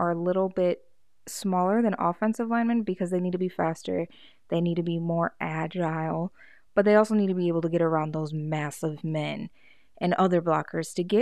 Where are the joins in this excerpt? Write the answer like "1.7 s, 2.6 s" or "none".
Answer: none